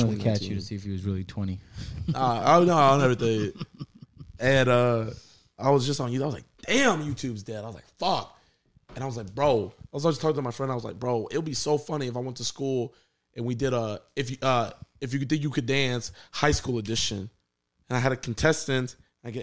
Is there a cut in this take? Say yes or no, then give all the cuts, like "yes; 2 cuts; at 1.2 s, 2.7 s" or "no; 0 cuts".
no; 0 cuts